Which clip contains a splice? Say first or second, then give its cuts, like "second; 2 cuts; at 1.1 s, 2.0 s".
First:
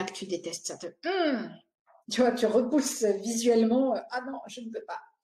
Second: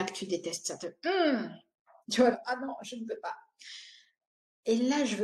second; 1 cut; at 2.3 s